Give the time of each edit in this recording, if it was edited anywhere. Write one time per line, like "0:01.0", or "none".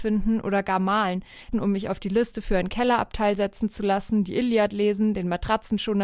0:01.5